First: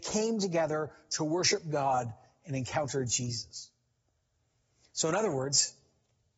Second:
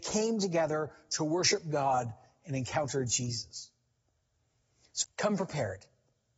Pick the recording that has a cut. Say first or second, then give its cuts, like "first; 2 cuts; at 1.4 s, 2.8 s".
second; 1 cut; at 5.0 s